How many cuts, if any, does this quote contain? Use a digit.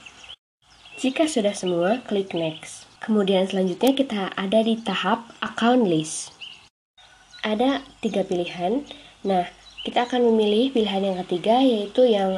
1